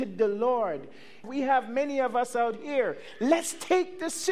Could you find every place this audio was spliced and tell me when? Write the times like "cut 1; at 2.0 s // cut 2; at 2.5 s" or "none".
cut 1; at 1.2 s